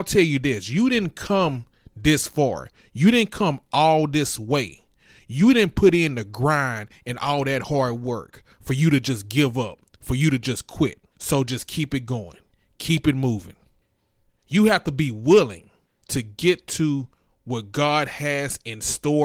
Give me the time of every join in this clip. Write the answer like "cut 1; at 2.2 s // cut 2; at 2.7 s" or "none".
cut 1; at 11.1 s // cut 2; at 14.3 s